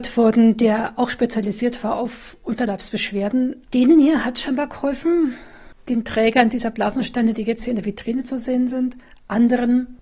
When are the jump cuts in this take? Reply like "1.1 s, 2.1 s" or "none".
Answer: 3.6 s